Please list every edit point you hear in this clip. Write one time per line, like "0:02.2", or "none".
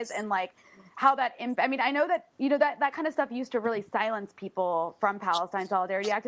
0:02.3